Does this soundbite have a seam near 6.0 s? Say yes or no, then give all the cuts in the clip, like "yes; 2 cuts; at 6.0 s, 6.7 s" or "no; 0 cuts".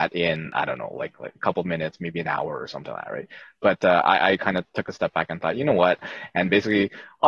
yes; 1 cut; at 6.0 s